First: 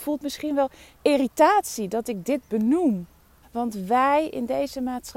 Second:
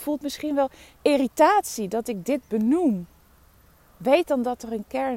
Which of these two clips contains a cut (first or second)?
first